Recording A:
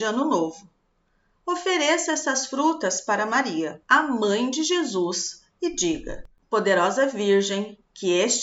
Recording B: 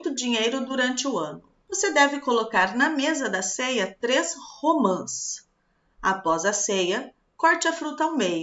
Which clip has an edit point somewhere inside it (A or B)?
A